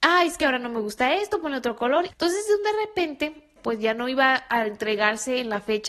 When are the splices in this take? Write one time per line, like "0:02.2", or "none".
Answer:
0:02.1
0:03.6